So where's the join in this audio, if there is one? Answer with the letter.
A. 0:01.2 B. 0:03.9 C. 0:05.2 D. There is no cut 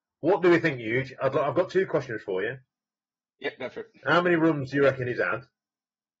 D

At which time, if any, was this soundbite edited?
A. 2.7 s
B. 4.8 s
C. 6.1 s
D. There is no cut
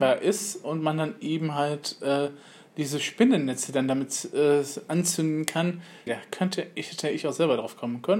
C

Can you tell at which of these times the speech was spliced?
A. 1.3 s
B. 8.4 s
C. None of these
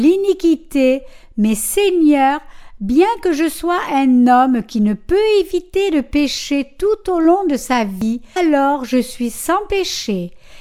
B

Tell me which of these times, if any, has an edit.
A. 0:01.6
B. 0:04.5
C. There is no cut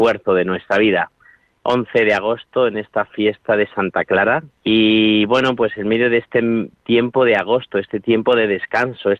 B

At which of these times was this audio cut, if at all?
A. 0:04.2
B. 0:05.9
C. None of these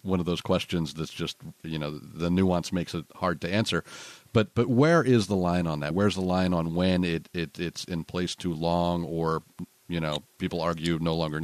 B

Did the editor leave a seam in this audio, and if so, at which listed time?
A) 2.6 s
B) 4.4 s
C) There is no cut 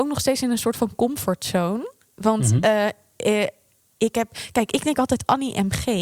C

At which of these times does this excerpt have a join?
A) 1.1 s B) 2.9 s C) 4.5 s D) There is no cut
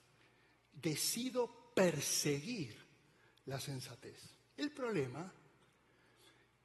D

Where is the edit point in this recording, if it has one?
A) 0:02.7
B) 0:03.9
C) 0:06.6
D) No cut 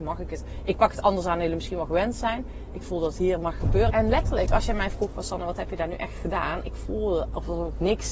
B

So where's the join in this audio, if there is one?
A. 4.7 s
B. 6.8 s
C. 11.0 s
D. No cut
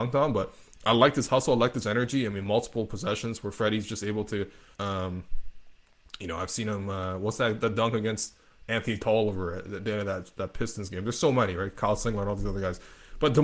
A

